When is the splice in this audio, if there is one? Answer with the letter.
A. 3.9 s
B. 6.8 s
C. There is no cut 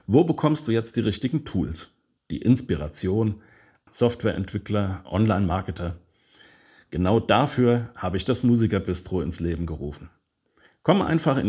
A